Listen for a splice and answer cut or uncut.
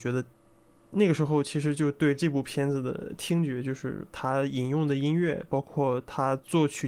cut